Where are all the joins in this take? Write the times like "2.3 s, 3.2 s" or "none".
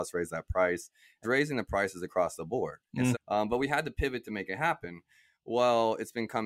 1.2 s, 3.1 s